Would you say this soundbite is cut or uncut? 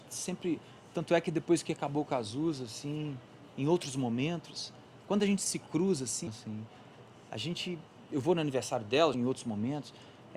cut